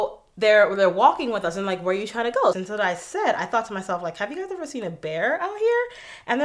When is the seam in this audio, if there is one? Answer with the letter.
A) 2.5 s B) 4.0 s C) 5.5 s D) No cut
A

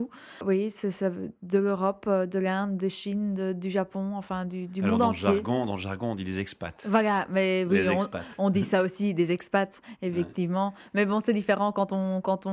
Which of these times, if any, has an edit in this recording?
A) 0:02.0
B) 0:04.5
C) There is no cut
C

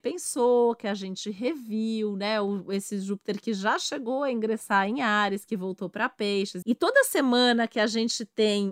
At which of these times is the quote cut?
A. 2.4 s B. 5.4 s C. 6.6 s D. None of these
C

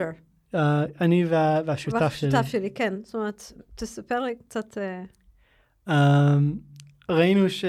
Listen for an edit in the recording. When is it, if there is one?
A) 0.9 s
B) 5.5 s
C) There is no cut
C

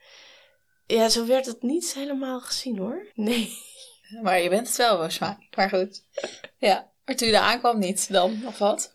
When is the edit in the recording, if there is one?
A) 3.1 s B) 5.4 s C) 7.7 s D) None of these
A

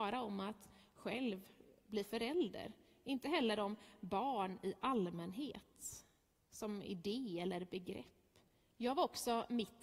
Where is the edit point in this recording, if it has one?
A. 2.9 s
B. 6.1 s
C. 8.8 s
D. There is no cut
C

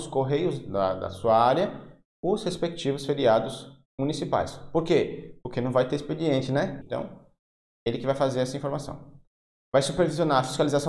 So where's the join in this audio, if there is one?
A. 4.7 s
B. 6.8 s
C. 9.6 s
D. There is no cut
B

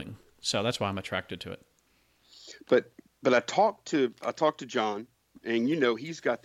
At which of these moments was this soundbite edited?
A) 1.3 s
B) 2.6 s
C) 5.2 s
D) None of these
D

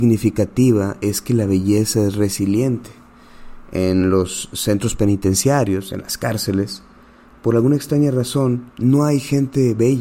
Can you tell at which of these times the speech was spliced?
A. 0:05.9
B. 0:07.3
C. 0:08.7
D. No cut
C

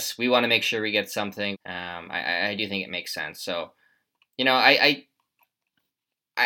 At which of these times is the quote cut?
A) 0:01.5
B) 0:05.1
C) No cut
A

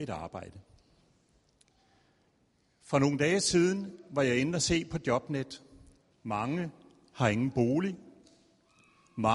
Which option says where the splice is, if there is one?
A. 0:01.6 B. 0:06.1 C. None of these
B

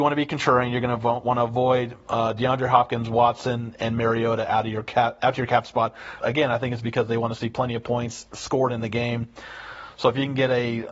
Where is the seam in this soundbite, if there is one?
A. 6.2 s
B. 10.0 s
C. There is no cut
A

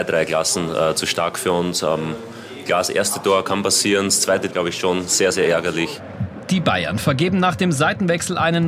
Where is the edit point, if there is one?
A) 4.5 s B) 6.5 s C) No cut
A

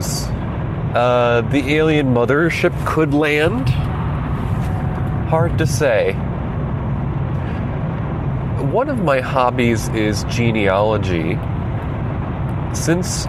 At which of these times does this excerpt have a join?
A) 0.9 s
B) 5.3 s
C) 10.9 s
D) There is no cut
A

